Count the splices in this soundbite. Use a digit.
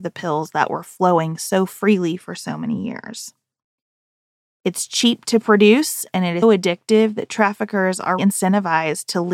3